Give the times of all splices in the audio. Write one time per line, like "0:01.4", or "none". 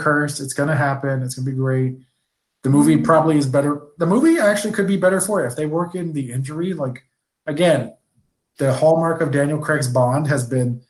none